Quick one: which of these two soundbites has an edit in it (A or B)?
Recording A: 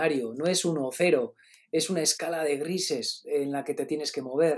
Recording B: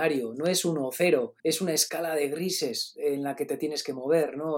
B